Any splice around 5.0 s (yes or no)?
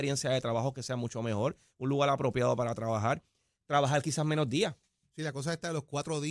no